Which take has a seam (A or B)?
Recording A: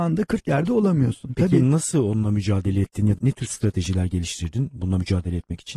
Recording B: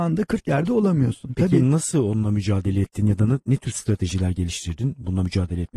A